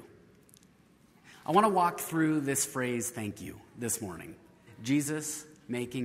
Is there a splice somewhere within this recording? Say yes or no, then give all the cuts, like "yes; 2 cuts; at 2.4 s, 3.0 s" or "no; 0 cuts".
yes; 1 cut; at 4.7 s